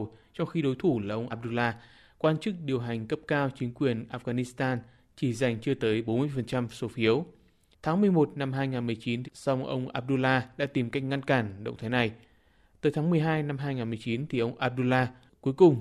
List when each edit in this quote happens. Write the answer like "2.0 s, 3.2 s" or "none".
1.3 s, 7.7 s, 9.2 s